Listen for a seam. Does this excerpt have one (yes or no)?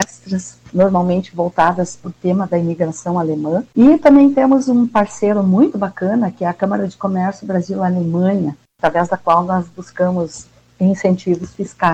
no